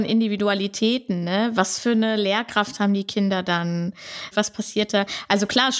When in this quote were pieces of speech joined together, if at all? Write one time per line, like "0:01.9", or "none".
0:04.3